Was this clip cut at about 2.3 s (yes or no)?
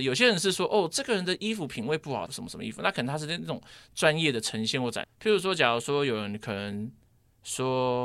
yes